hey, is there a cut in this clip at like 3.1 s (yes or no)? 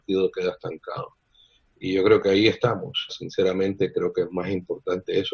yes